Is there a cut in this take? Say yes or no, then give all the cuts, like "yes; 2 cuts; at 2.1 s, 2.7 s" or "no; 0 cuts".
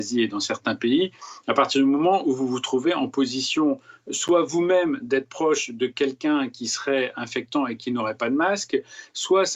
no; 0 cuts